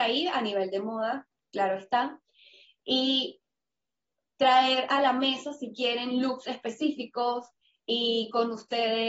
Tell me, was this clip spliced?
no; 0 cuts

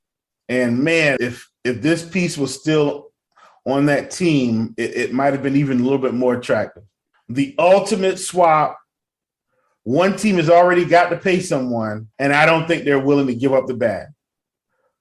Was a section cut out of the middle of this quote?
yes; 3 cuts; at 1.2 s, 7.1 s, 12.1 s

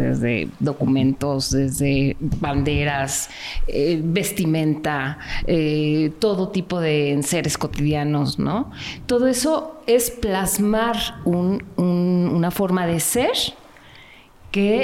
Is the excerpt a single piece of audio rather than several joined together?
yes; 0 cuts

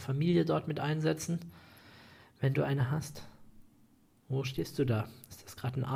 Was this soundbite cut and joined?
no; 0 cuts

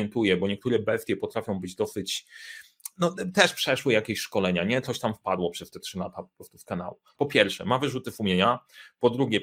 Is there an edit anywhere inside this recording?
yes; 1 cut; at 7.2 s

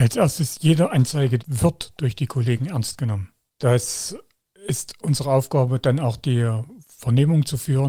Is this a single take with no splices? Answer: no; 1 cut; at 1.4 s

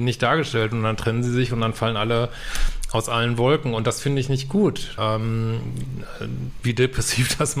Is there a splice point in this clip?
yes; 2 cuts; at 5.0 s, 6.6 s

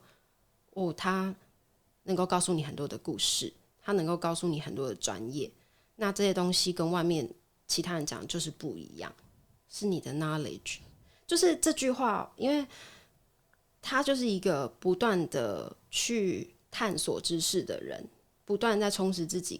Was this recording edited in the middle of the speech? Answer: yes; 3 cuts; at 9.2 s, 12.4 s, 16.6 s

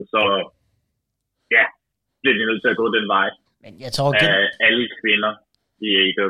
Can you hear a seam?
yes; 1 cut; at 3.5 s

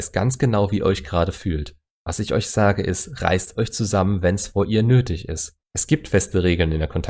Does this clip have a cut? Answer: yes; 2 cuts; at 2.0 s, 5.6 s

